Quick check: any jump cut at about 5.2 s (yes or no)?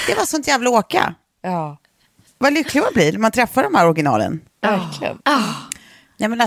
yes